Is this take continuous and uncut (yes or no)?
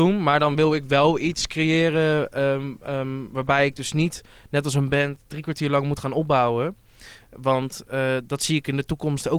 yes